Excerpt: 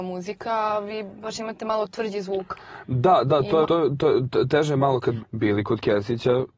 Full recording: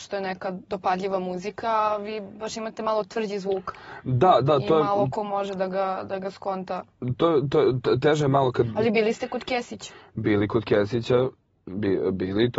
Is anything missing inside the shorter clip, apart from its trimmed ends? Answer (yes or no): yes